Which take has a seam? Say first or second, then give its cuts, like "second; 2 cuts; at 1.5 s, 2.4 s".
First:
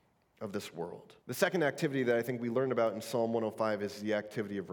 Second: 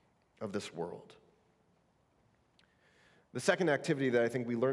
first; 1 cut; at 1.2 s